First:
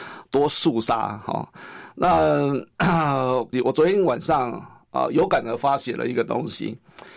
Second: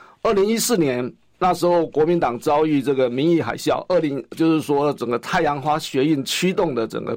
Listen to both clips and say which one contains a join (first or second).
first